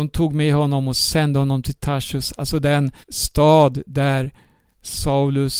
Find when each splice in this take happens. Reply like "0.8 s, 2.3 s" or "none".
3.0 s